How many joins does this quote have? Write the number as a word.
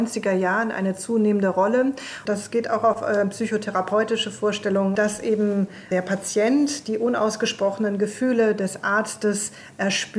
two